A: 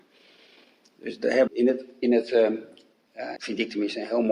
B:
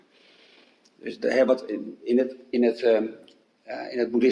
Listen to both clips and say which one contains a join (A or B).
A